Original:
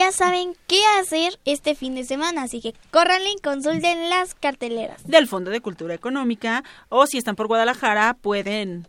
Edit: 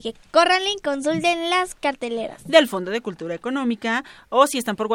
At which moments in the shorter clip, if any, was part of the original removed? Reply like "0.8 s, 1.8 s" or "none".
none